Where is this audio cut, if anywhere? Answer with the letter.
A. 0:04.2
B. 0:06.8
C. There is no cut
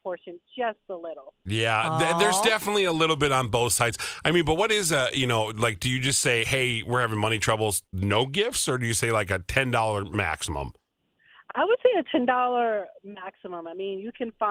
C